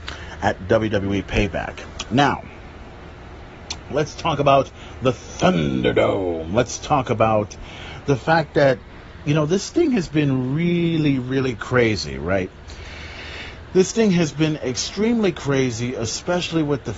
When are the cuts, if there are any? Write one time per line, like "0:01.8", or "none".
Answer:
none